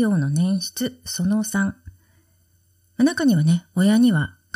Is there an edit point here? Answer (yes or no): no